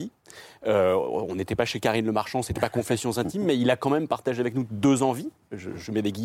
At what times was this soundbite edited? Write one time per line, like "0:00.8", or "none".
none